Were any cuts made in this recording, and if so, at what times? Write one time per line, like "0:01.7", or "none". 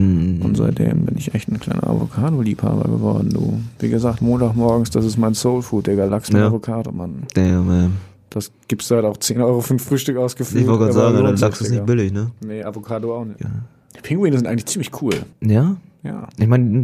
0:13.4
0:15.3